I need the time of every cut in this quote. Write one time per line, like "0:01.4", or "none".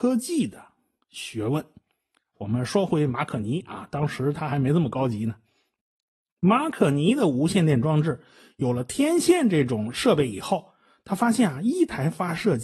0:02.3